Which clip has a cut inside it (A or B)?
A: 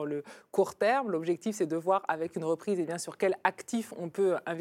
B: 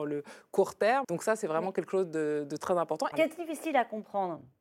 B